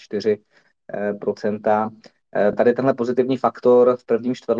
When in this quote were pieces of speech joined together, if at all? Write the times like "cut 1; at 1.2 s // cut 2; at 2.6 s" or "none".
none